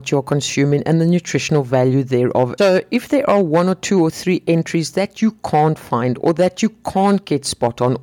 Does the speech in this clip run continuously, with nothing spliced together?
no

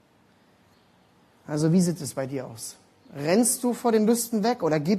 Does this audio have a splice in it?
no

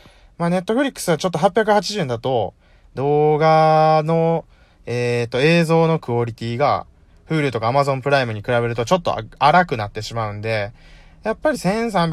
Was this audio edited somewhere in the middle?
no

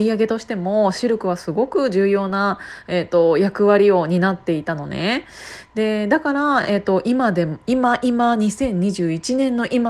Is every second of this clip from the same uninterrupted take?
yes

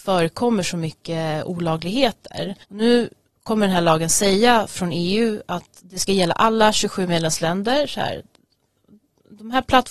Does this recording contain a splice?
yes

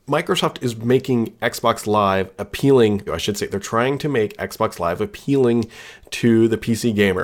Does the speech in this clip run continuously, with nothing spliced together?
no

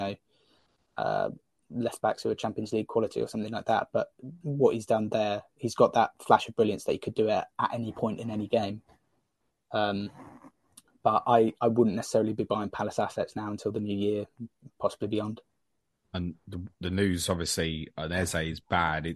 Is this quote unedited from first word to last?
yes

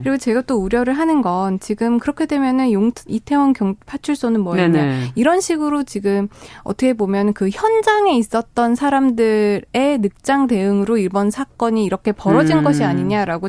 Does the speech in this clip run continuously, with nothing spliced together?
no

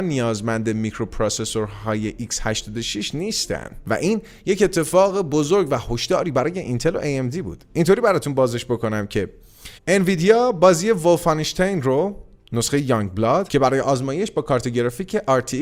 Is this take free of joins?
no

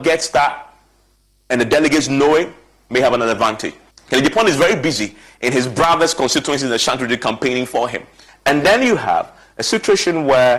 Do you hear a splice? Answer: yes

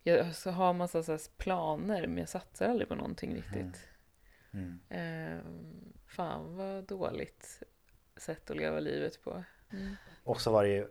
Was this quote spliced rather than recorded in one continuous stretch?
yes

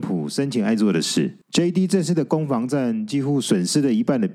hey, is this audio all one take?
no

